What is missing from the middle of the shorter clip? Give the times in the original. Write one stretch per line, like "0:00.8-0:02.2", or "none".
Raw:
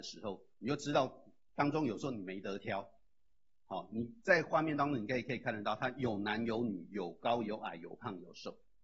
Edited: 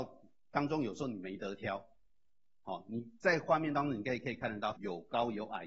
0:05.8-0:06.9